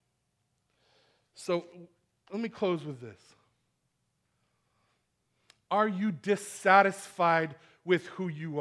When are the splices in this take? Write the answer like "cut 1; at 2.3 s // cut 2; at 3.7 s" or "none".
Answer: none